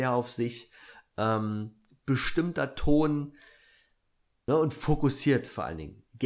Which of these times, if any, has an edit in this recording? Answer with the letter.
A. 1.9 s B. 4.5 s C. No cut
B